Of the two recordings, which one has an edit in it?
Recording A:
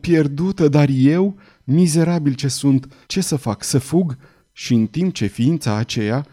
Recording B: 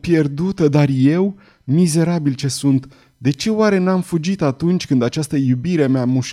A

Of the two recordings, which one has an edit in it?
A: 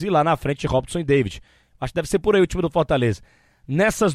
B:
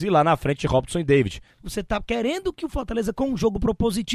B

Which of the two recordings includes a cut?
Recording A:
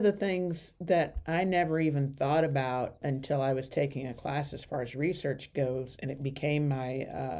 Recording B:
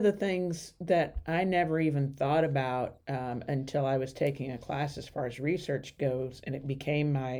A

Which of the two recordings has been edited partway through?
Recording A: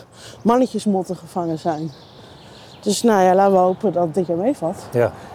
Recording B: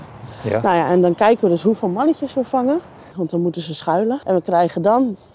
B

